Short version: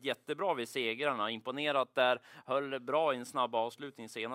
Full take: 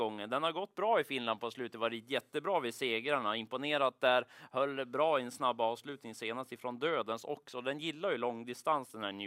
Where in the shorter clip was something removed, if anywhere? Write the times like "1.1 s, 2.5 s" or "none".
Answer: none

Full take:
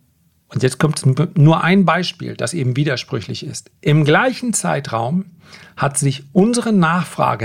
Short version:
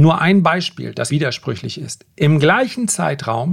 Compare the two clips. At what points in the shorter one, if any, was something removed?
1.1 s

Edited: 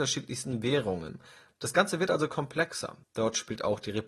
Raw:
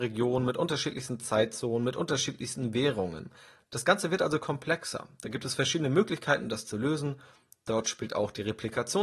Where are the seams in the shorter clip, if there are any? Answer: 3.0 s

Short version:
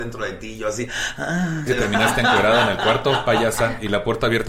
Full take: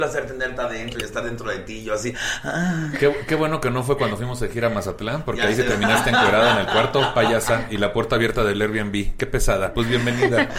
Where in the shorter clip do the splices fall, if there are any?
1.7 s

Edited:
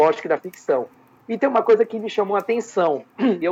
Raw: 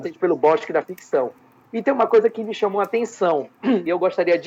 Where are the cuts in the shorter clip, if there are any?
none

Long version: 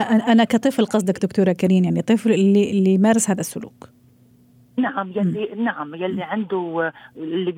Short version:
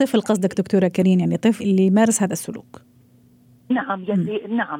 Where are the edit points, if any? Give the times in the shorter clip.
1.6 s

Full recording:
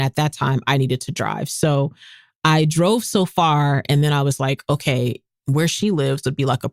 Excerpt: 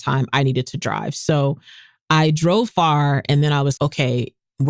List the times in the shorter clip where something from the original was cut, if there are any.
2.7 s, 3.8 s

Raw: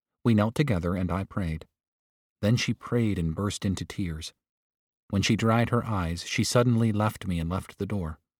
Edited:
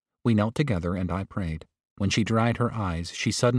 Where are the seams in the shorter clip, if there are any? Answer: 1.9 s

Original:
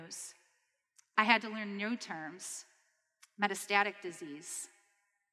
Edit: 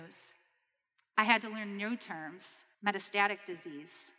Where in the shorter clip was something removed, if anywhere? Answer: 2.7 s

